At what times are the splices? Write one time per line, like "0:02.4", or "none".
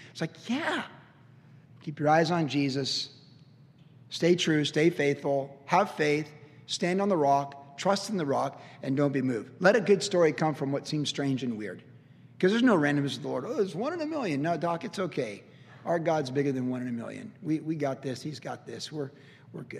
0:01.7